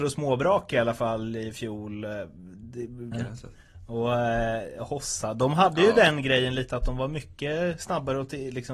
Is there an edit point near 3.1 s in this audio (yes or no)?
yes